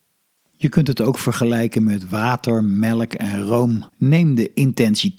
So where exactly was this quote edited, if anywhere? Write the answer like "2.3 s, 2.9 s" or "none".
3.9 s